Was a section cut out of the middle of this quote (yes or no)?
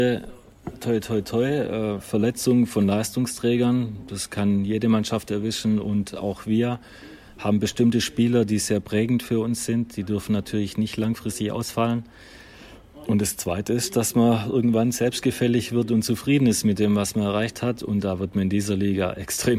no